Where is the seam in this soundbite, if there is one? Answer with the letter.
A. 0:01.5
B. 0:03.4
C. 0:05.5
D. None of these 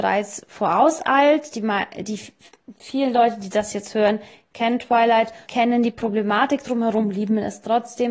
C